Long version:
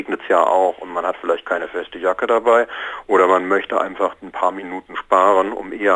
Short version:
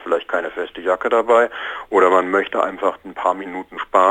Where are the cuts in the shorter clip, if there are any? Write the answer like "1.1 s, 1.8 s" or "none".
none